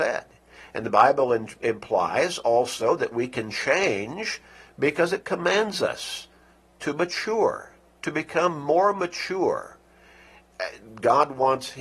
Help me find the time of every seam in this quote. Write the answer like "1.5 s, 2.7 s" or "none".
none